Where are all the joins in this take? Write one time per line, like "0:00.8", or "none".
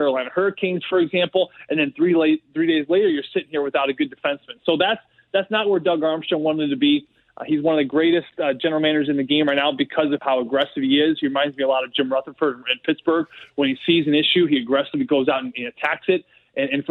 none